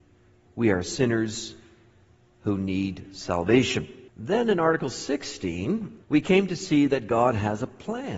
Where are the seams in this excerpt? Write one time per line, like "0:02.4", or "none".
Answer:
0:04.1
0:06.0

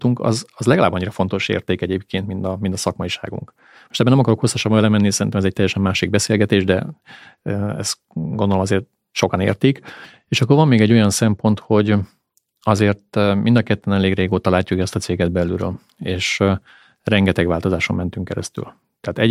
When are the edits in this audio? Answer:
none

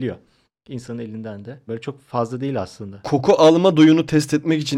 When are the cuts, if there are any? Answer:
0:01.7

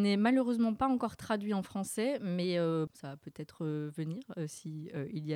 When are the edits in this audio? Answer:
0:02.9

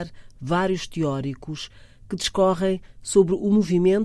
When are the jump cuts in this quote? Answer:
none

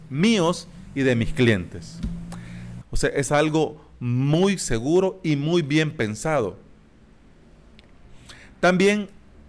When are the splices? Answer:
0:02.8

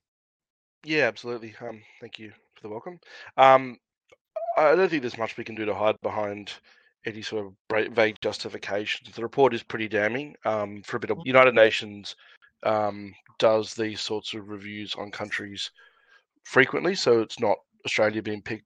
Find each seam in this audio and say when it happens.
0:11.2

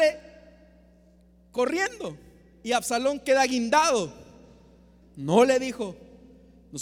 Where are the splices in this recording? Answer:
0:05.0

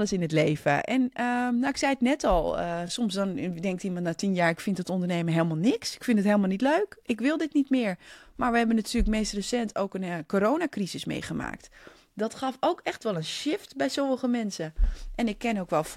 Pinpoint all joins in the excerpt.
none

